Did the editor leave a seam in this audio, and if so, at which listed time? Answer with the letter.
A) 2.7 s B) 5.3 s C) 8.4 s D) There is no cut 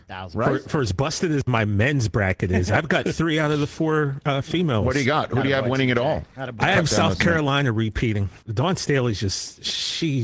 C